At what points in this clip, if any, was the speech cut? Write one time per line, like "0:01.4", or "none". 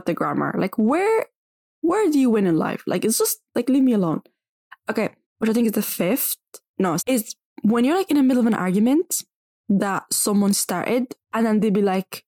0:05.2
0:07.0
0:11.2